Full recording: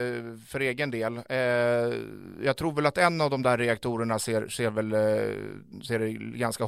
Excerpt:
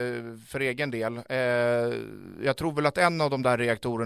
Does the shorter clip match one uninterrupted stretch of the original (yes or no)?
yes